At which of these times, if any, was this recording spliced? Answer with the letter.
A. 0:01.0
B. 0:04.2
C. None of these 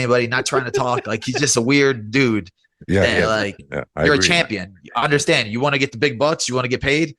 C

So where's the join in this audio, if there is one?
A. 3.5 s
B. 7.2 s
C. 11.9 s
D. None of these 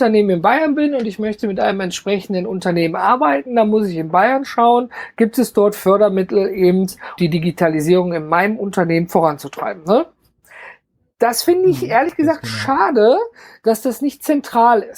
B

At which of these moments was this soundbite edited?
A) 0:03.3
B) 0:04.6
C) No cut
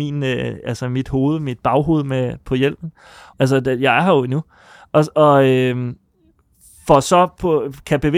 A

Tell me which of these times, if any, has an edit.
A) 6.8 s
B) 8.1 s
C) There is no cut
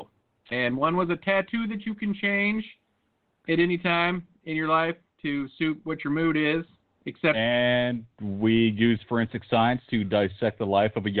B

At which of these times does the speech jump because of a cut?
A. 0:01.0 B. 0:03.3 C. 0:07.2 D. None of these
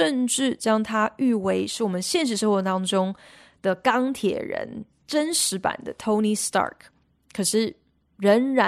D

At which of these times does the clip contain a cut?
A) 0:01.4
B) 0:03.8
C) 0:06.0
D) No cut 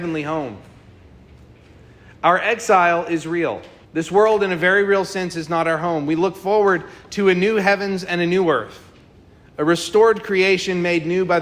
B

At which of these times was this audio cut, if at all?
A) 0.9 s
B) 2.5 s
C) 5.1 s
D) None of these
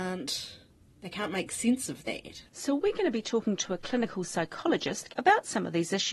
C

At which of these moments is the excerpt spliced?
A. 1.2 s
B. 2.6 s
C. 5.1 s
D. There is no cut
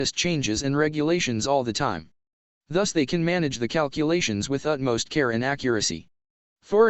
D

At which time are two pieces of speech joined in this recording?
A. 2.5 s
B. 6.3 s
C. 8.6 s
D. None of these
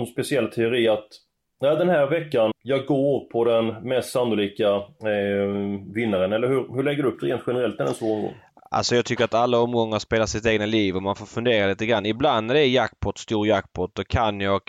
A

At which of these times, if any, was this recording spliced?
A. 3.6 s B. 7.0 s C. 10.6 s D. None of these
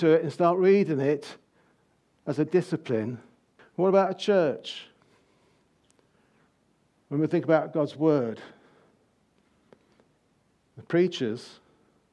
A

